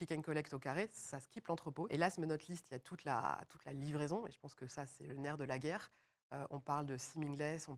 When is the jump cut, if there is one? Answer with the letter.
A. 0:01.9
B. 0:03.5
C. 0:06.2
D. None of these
A